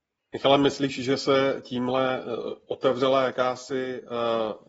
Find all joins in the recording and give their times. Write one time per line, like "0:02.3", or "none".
none